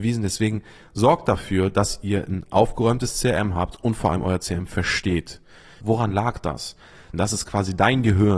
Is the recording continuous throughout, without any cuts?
no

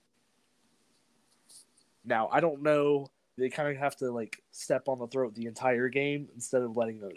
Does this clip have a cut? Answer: yes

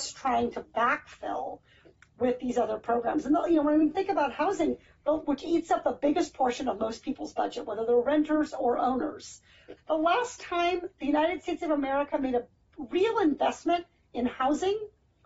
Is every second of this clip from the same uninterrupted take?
no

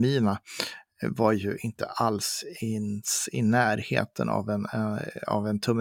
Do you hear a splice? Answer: no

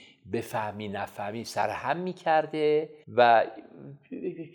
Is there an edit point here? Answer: yes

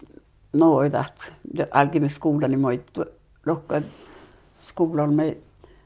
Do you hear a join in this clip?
yes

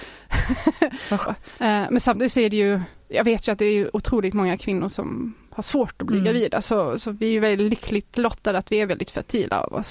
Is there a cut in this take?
yes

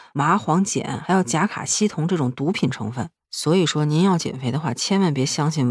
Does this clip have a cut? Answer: yes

